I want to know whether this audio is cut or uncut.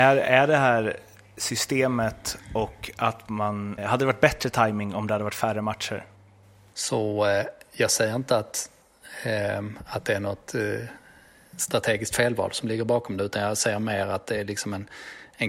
cut